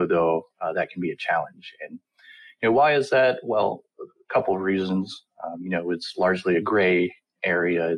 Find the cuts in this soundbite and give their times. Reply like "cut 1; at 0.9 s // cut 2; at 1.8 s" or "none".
none